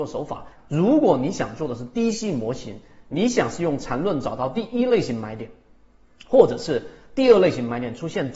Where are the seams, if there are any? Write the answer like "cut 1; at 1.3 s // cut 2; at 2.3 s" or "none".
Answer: none

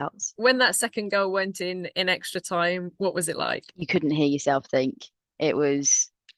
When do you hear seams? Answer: none

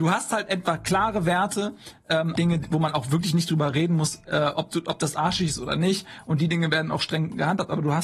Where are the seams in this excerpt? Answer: cut 1; at 2.4 s

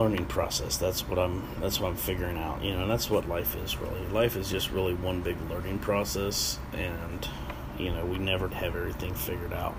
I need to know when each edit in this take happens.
cut 1; at 8.5 s

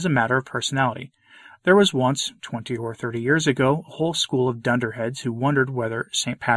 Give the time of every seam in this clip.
none

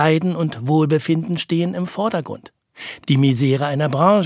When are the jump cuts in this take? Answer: cut 1; at 3.0 s

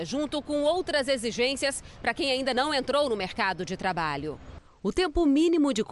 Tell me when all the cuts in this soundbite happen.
none

